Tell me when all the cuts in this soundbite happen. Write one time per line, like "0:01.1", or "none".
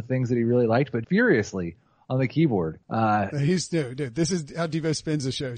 0:01.0
0:02.8